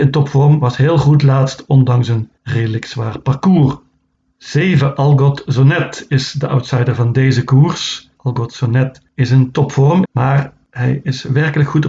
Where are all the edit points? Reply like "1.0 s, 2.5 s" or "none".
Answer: 10.1 s